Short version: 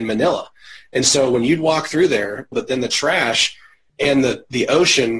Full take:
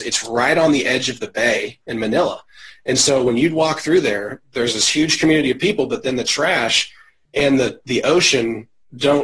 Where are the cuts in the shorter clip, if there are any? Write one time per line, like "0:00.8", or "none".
0:02.5